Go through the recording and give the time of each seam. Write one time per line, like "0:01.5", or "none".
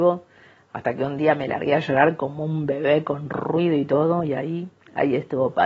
none